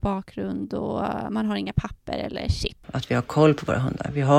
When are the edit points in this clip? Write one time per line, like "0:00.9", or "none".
0:02.8